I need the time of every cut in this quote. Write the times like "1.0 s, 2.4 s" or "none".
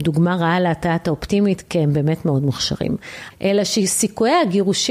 3.3 s